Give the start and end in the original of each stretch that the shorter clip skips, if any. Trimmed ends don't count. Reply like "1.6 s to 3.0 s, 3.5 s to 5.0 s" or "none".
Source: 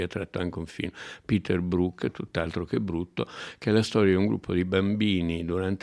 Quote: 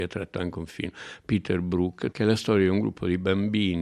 2.1 s to 3.6 s

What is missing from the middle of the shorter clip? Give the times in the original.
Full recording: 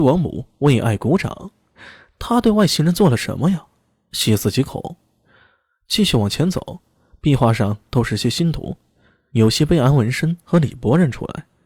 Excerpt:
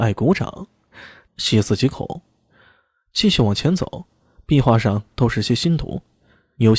2.1 s to 4.0 s

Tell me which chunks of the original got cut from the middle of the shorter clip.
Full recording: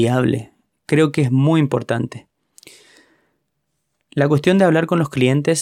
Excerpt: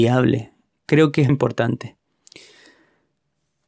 1.3 s to 1.6 s

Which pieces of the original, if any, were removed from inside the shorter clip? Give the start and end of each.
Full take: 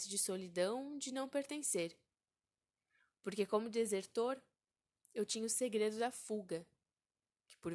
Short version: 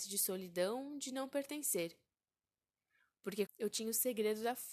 3.5 s to 5.0 s

